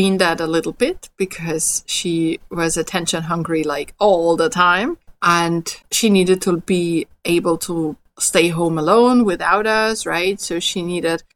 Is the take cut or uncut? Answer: cut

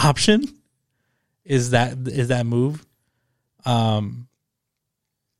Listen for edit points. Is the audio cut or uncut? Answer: uncut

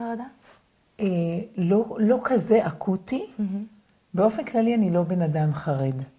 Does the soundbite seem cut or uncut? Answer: uncut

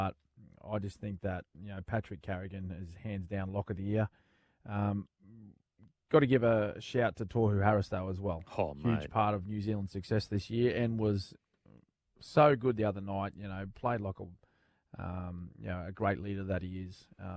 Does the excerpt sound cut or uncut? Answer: uncut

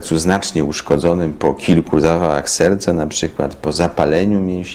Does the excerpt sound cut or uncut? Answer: uncut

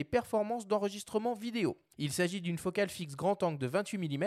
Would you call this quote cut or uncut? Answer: cut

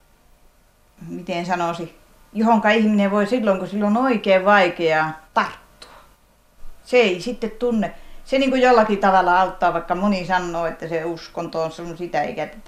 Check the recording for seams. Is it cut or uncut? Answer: cut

